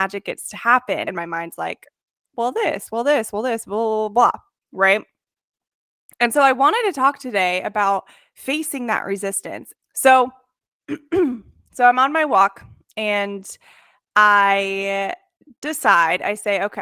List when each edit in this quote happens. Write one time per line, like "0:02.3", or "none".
0:01.1
0:09.7